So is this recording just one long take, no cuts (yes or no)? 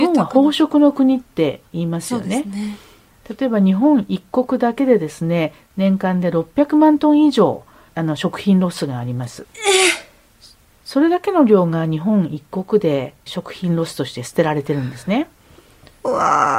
no